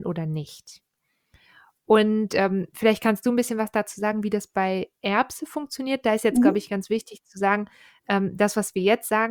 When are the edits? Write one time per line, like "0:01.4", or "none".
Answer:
none